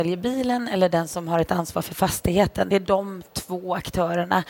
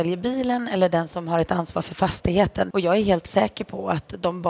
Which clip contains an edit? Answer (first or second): second